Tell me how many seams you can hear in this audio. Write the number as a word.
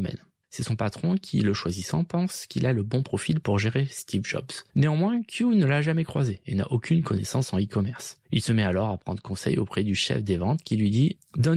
zero